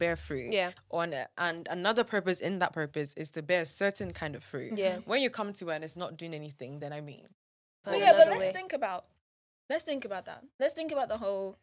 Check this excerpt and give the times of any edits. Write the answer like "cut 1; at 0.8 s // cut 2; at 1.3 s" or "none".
none